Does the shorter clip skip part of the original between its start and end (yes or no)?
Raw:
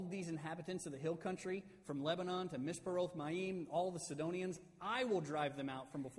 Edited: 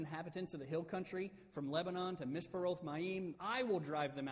yes